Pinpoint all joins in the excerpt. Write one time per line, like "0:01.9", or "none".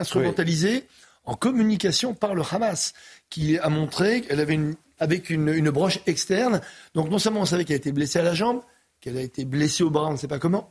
0:05.0